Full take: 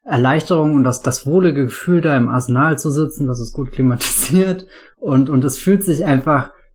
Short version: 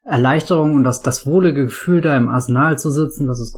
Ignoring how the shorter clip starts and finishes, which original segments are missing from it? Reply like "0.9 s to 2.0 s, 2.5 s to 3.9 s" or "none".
none